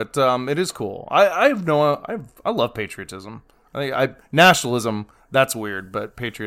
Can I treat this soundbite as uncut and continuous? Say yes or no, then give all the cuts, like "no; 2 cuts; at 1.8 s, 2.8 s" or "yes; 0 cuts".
yes; 0 cuts